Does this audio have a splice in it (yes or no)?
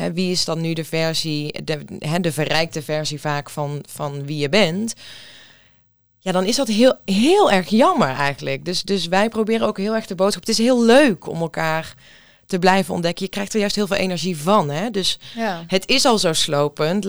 no